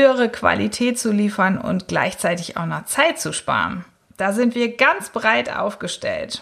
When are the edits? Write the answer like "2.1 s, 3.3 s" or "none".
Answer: 4.0 s